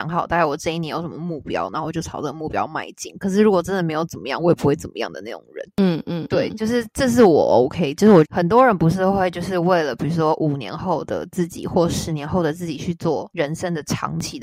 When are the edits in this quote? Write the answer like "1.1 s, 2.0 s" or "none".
8.2 s